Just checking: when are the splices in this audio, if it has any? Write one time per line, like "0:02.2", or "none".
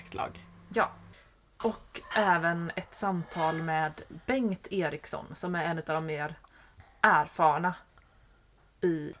none